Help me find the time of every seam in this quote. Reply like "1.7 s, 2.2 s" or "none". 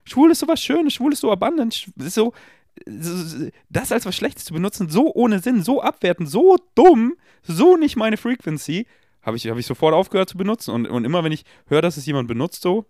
none